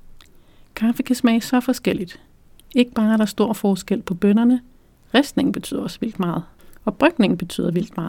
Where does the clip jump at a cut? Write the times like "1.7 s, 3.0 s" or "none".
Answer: 2.6 s